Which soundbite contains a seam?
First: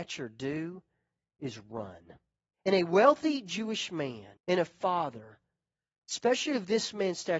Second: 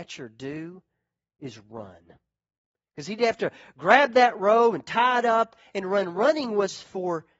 first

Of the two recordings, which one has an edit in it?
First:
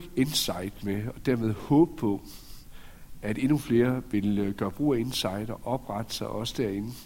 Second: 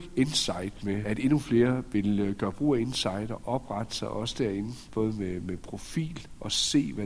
second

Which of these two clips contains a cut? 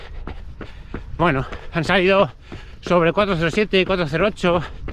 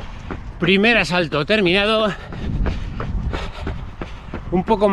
first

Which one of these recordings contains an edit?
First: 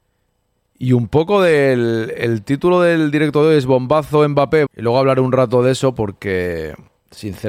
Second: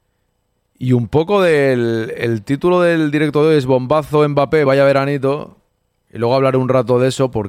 first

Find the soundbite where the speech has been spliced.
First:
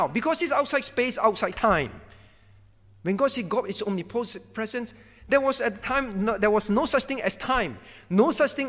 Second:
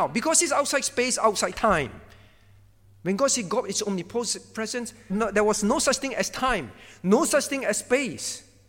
second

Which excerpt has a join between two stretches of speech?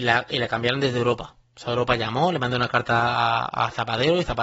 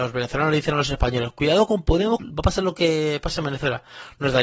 second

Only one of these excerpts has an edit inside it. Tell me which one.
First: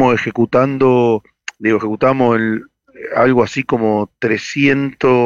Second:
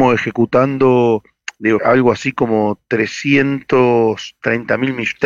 second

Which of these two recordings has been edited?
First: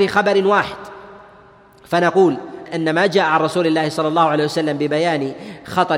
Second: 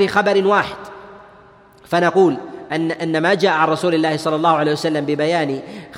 first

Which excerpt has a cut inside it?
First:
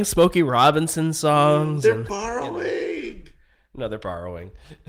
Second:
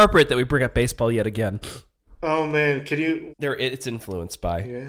second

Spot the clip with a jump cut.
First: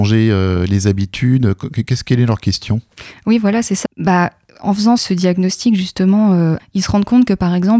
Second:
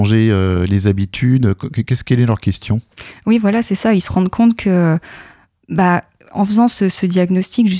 first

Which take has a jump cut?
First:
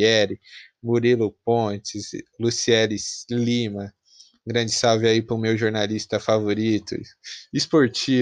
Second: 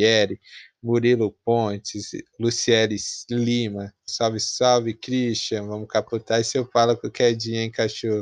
second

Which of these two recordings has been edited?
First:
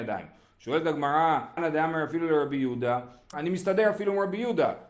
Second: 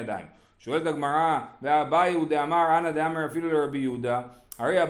first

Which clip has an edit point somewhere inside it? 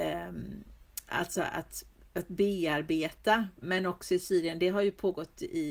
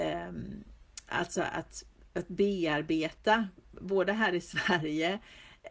first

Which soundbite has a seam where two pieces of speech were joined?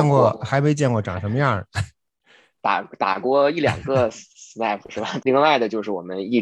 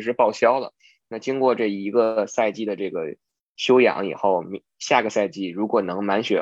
first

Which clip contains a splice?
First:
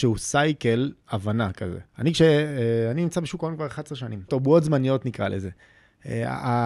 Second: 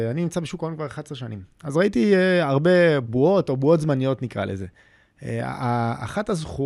first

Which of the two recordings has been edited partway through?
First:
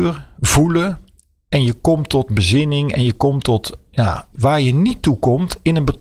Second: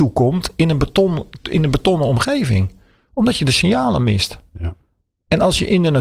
first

